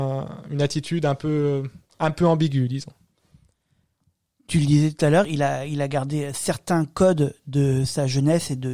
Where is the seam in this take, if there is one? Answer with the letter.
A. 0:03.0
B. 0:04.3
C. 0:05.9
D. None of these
D